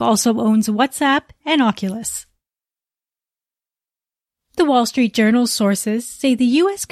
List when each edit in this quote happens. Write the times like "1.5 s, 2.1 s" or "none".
1.4 s